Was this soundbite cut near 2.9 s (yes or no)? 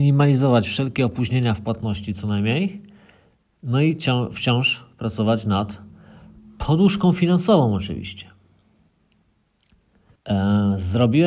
no